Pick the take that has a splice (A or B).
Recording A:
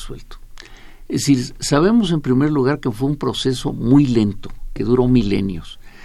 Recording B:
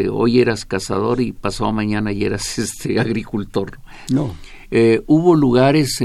B